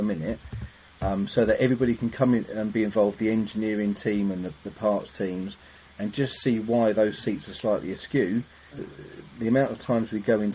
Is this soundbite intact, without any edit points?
no; 1 cut; at 8.8 s

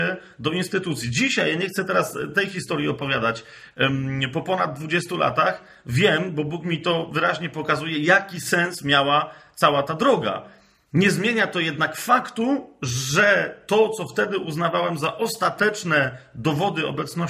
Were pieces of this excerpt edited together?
no; 0 cuts

